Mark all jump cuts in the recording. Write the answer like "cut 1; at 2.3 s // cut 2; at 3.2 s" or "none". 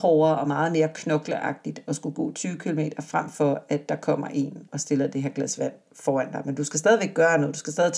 cut 1; at 4.7 s